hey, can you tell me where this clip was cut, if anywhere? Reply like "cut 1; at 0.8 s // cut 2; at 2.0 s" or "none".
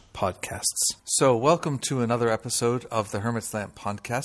cut 1; at 1.0 s